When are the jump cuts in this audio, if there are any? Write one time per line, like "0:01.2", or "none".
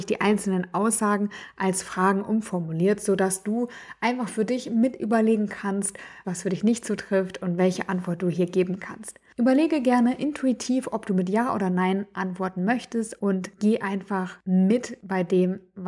0:06.2